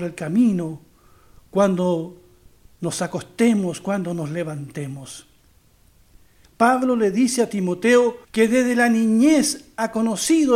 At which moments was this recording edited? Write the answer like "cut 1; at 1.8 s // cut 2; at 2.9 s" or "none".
cut 1; at 6.4 s // cut 2; at 8.2 s

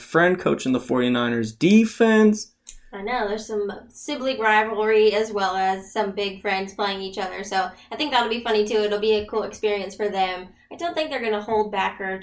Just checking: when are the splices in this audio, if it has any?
none

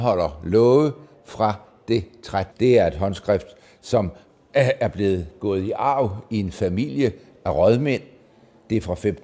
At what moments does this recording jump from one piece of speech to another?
cut 1; at 2.5 s

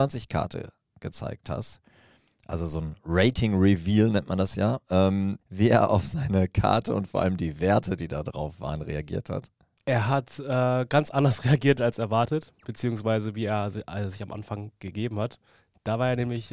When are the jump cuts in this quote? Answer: cut 1; at 5.4 s

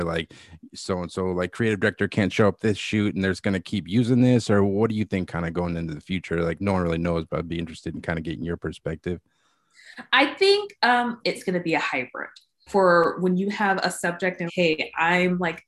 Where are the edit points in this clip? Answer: cut 1; at 11.2 s // cut 2; at 12.7 s // cut 3; at 14.5 s

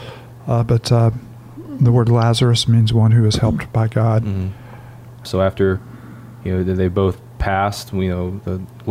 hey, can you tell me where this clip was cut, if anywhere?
cut 1; at 5.3 s

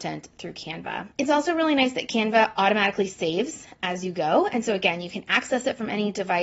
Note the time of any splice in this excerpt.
cut 1; at 1.1 s

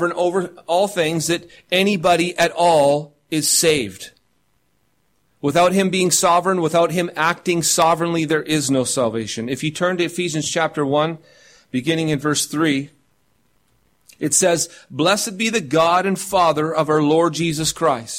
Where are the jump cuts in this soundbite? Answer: none

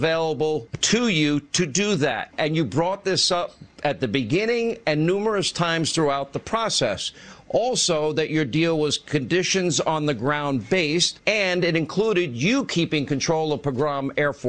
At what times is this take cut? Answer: none

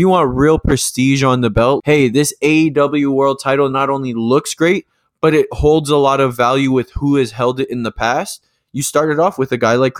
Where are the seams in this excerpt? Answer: cut 1; at 1.8 s

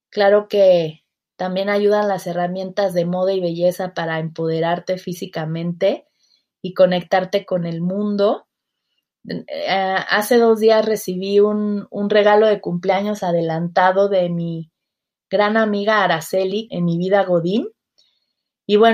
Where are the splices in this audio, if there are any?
cut 1; at 16.7 s

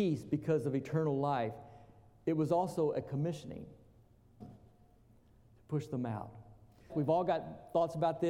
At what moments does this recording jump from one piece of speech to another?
cut 1; at 4.4 s // cut 2; at 6.9 s

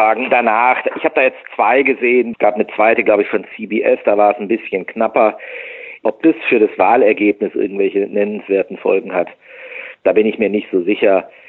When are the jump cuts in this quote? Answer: cut 1; at 2.3 s

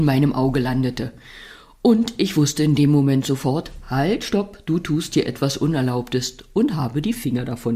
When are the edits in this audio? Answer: none

